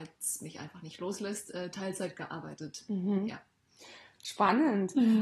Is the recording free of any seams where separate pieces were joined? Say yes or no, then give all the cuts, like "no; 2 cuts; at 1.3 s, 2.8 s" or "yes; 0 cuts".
yes; 0 cuts